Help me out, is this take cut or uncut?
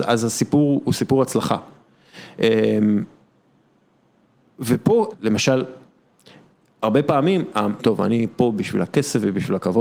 cut